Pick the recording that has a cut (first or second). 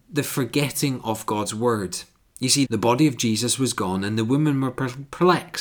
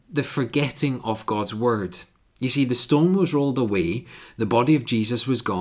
first